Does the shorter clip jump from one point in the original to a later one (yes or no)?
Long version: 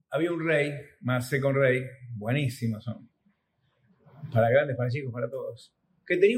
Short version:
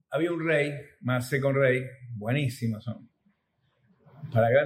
no